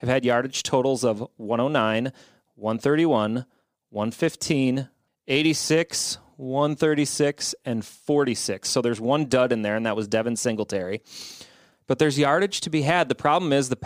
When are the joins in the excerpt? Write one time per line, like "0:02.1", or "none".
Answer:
0:05.1